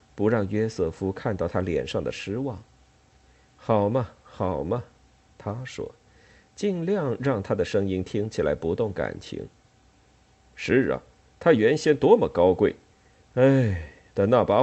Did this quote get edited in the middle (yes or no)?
no